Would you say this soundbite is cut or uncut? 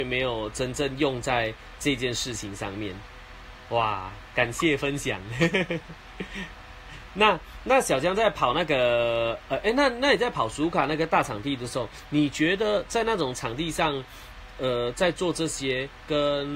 uncut